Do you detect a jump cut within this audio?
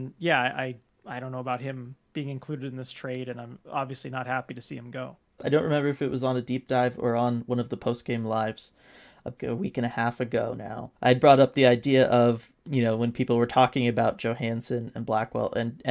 yes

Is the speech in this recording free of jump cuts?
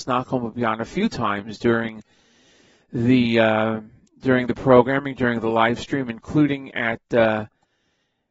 yes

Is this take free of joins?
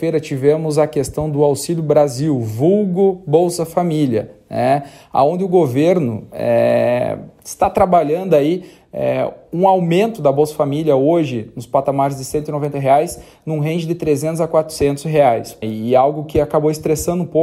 no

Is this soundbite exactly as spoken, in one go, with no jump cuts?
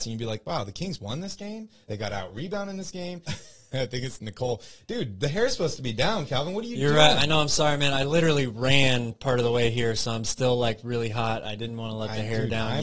no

